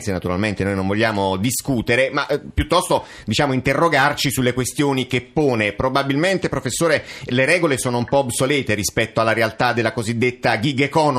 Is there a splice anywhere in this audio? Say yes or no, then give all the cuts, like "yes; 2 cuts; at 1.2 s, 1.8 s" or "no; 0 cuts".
no; 0 cuts